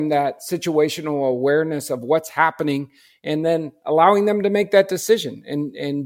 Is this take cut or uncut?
uncut